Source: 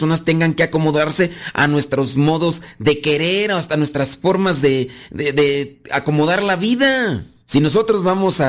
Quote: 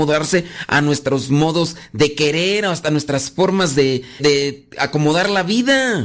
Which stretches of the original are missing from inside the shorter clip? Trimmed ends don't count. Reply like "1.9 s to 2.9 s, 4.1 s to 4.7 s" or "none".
5.1 s to 5.3 s

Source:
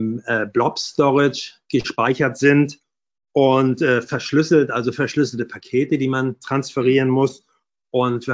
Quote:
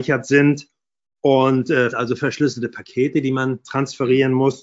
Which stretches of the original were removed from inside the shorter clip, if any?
4.0 s to 4.7 s

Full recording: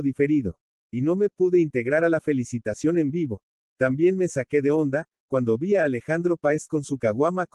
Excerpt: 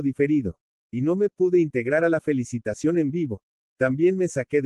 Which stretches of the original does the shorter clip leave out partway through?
none

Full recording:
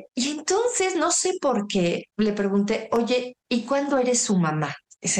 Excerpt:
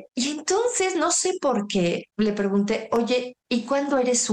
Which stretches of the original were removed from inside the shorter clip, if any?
none

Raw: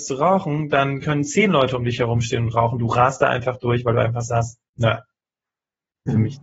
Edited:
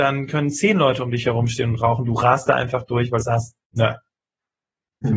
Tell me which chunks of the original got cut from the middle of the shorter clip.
3.9 s to 4.2 s

